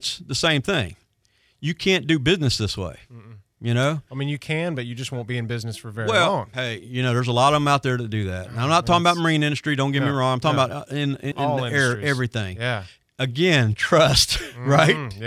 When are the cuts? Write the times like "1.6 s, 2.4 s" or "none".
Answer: 11.3 s

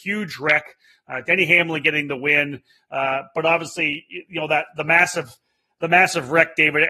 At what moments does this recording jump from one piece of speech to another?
none

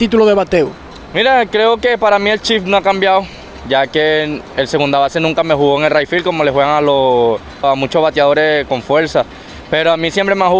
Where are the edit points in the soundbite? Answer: 3.6 s, 7.6 s

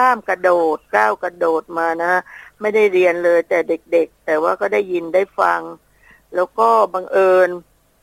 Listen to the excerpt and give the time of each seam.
none

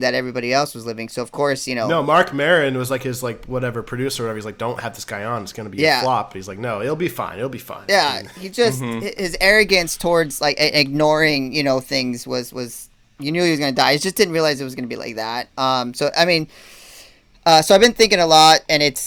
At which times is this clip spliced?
none

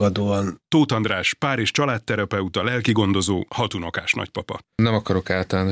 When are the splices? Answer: 3.5 s, 4.6 s

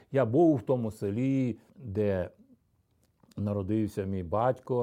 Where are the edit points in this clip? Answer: 1.7 s

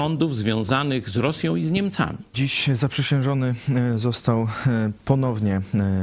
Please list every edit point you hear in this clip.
2.3 s

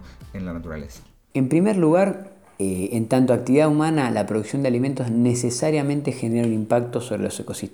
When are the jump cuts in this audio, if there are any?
none

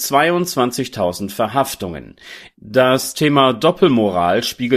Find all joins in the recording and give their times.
2.5 s

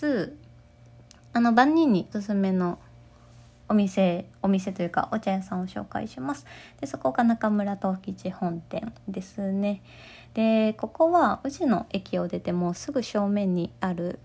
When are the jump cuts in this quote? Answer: 2.1 s

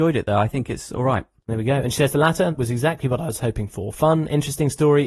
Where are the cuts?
2.5 s

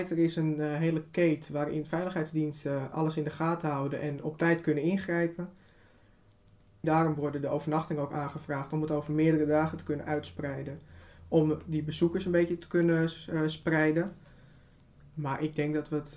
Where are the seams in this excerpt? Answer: 2.9 s, 6.8 s

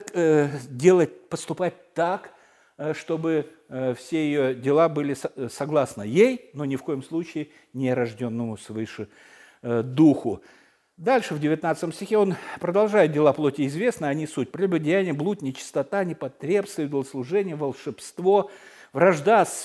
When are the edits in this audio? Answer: none

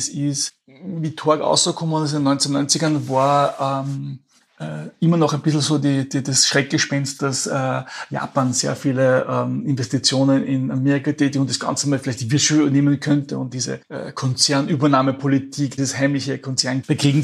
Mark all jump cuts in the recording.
none

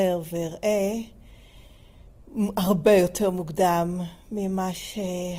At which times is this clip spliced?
none

